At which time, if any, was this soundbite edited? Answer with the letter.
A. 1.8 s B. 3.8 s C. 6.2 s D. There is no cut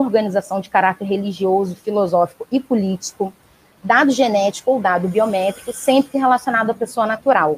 B